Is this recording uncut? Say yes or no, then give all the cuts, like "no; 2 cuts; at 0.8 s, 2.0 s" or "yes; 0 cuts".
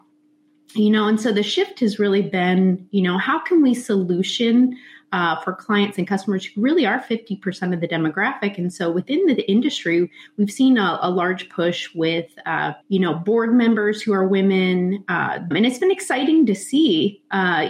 no; 2 cuts; at 12.8 s, 15.5 s